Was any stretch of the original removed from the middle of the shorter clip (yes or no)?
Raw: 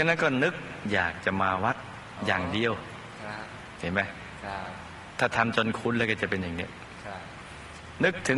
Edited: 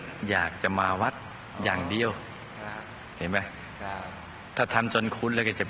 no